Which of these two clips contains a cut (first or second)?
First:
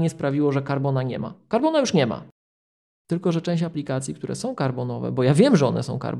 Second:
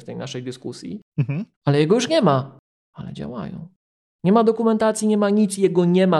second